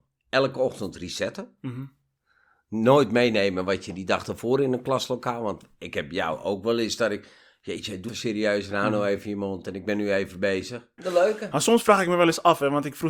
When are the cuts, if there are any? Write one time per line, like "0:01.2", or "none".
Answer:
0:08.1
0:11.0